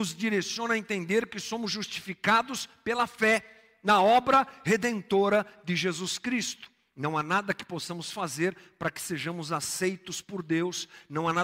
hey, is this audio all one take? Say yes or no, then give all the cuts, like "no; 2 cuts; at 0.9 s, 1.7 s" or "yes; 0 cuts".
yes; 0 cuts